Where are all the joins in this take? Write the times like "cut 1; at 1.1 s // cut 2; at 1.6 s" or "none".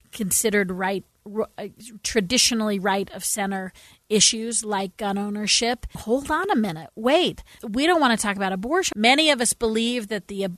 cut 1; at 5.9 s // cut 2; at 7.6 s // cut 3; at 8.9 s